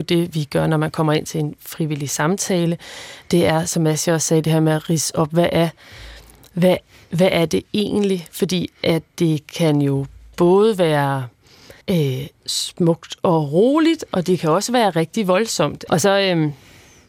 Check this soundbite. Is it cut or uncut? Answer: cut